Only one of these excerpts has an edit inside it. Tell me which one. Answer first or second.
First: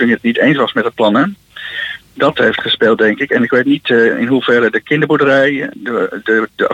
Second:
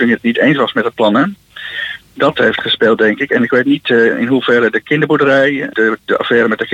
second